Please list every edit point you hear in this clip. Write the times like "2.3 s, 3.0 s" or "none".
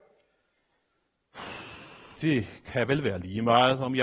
2.1 s